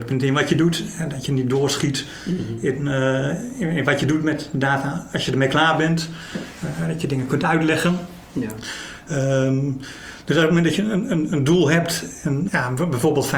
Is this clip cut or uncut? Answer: cut